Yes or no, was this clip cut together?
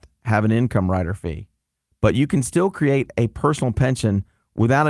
no